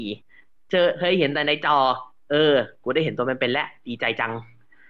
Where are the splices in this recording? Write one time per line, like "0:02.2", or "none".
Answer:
none

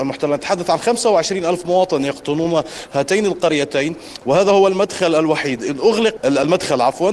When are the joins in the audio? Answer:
0:06.2

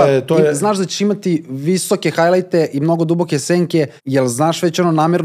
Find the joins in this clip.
0:04.0

